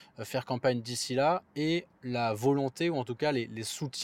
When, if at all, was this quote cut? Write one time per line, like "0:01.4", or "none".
none